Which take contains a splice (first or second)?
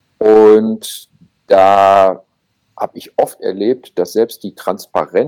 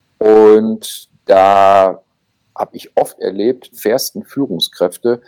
second